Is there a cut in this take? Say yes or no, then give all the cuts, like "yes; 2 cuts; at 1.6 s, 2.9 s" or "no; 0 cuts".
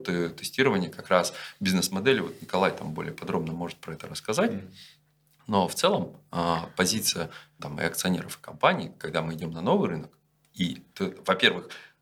yes; 1 cut; at 7.6 s